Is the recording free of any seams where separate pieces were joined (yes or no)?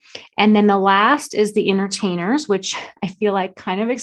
yes